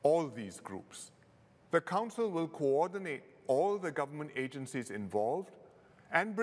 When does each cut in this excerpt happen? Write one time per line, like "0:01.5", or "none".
0:01.6